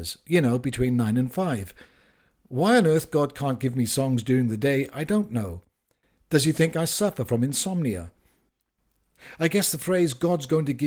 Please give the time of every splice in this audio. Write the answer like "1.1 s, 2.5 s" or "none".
none